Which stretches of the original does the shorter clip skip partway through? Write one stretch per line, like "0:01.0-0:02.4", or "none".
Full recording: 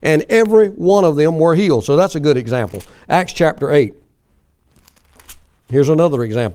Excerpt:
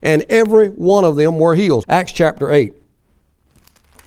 0:01.8-0:03.0